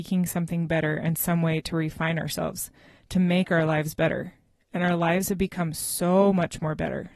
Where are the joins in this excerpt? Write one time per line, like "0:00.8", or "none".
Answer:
none